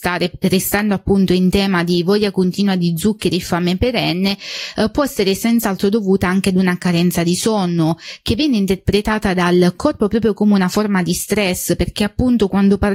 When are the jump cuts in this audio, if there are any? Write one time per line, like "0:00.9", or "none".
none